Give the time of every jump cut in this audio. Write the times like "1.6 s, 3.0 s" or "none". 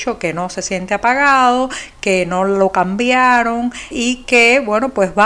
3.9 s